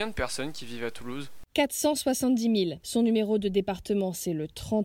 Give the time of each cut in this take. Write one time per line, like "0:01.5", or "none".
0:02.8